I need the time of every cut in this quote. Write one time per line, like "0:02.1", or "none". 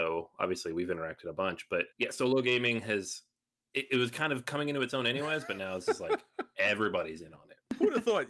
0:01.9